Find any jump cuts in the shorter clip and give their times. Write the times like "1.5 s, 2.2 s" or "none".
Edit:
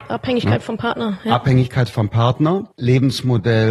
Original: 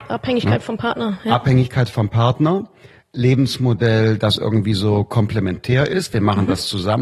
2.7 s